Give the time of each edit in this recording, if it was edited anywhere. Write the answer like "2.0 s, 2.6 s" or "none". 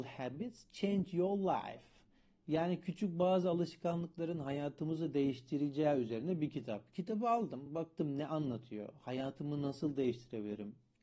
none